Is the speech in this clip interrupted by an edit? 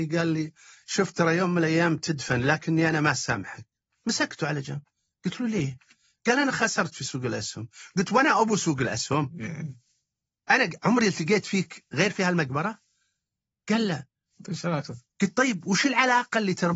no; 0 cuts

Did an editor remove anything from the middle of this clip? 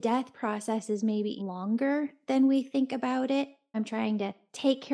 yes; 2 cuts; at 1.4 s, 3.7 s

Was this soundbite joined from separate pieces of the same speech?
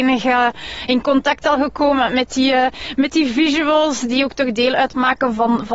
no; 0 cuts

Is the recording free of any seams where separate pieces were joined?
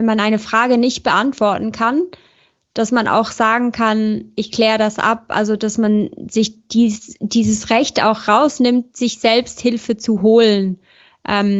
yes; 0 cuts

